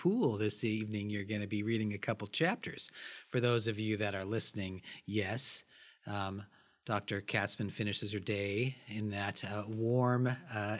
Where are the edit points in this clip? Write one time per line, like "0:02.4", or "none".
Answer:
none